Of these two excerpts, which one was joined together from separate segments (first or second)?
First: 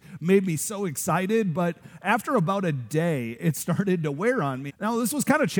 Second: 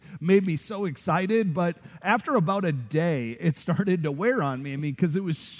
first